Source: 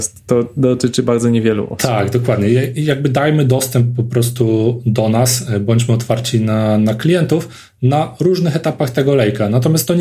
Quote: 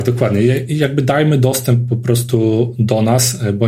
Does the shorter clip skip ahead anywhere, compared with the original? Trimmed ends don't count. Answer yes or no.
no